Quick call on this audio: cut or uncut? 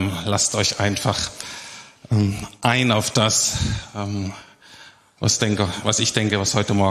uncut